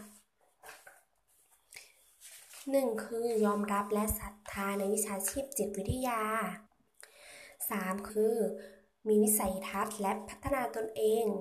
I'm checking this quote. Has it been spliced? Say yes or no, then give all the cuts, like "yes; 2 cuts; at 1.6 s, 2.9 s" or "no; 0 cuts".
yes; 3 cuts; at 3.1 s, 6.7 s, 8.1 s